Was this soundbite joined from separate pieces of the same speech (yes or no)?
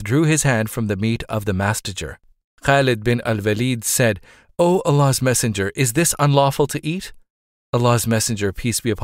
no